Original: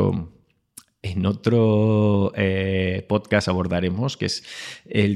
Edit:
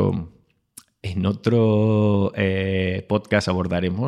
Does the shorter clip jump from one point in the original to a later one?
no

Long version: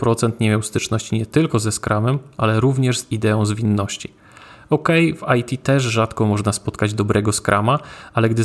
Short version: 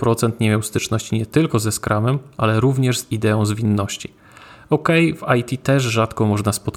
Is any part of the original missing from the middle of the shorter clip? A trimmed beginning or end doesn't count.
no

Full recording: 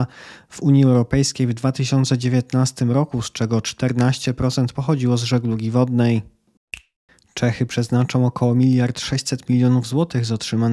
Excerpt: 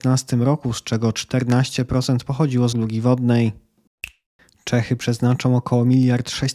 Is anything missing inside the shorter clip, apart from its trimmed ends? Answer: yes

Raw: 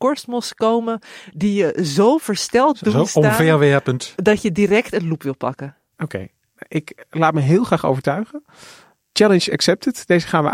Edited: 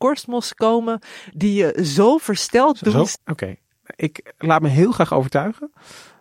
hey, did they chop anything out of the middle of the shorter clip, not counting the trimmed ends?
yes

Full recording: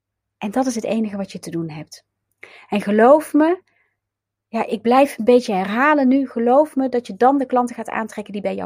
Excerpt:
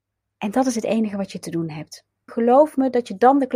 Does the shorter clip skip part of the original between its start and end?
yes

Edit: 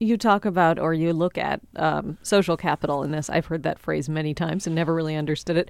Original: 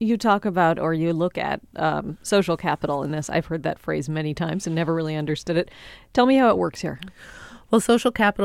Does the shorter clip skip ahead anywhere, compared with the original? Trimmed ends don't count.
no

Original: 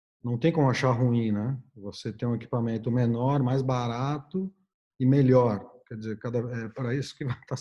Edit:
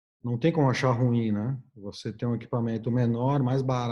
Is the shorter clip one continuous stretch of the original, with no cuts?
yes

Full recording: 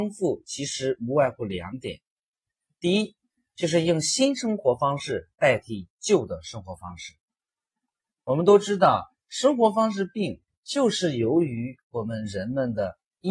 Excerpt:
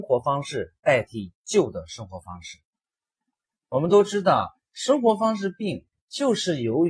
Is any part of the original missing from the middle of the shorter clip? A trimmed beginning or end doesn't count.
no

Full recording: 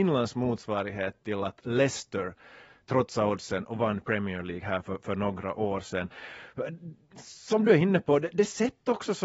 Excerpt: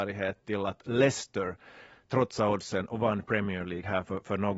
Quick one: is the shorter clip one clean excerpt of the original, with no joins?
yes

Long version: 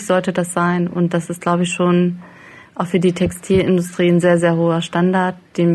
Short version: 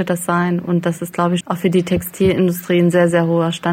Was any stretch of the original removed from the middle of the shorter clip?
yes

